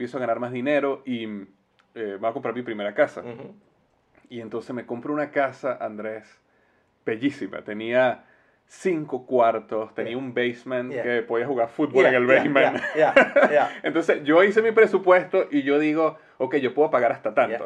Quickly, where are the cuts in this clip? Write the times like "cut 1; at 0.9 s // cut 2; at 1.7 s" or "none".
none